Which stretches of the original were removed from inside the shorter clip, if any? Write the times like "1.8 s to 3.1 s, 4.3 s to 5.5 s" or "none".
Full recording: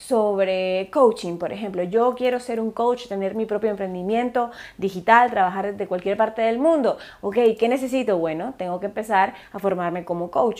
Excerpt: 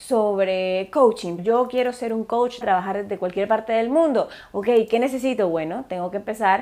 1.4 s to 1.8 s, 3.1 s to 5.3 s